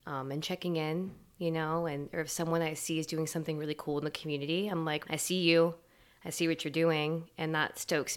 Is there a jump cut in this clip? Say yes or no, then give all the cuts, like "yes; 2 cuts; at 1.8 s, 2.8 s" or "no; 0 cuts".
yes; 1 cut; at 5.0 s